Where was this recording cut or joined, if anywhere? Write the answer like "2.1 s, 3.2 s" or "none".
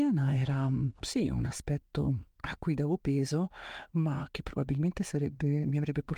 1.0 s